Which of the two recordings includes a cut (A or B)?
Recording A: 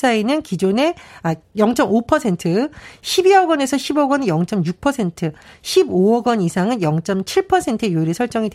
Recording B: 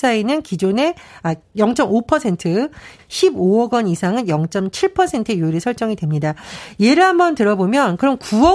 B